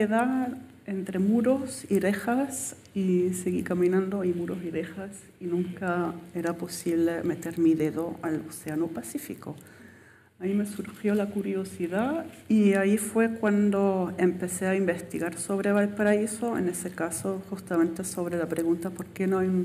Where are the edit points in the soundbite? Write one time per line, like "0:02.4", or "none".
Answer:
none